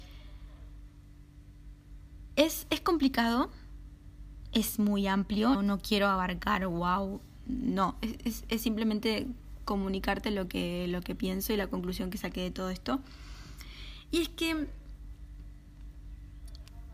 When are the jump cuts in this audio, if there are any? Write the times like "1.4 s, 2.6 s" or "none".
5.5 s